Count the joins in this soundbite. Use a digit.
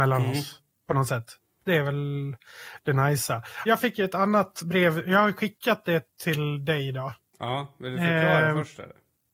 1